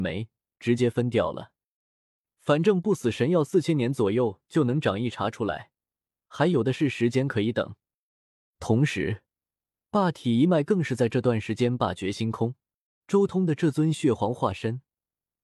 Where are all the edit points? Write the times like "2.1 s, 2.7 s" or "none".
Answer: 13.0 s